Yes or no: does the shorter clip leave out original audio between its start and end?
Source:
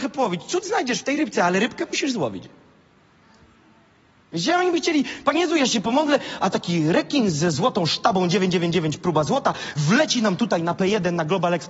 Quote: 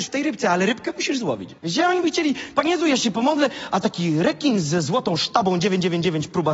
yes